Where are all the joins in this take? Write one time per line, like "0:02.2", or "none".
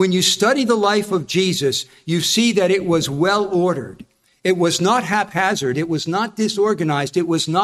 0:05.7